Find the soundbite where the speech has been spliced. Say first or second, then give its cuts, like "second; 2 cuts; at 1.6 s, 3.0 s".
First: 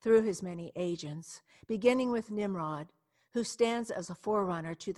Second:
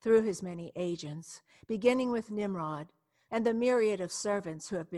second; 1 cut; at 3.3 s